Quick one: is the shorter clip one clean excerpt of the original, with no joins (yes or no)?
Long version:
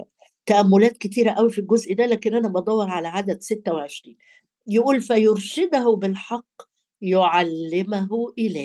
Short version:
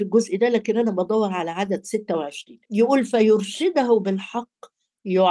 no